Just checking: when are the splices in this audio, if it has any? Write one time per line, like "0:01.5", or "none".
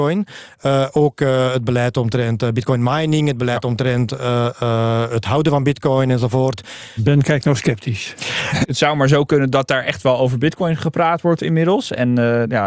0:07.0
0:08.6

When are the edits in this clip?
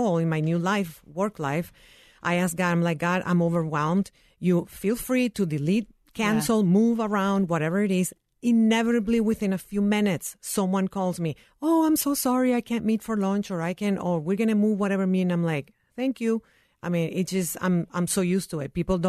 none

